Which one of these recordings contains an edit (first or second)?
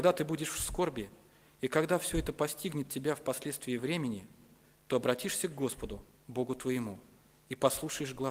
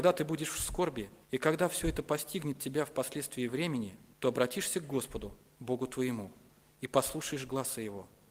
second